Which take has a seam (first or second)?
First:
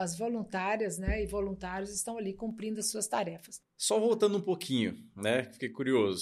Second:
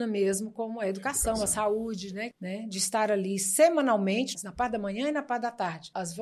second